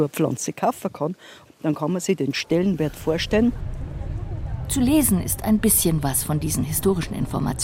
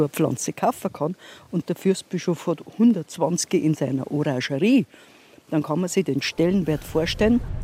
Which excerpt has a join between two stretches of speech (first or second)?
first